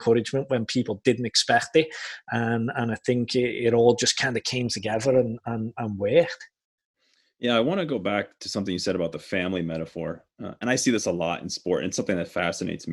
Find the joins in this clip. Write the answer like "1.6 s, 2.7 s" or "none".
none